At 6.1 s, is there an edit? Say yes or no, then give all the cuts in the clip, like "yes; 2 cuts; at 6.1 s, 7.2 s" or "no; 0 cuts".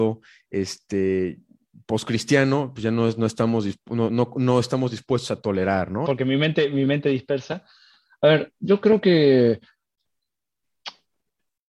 yes; 1 cut; at 6.1 s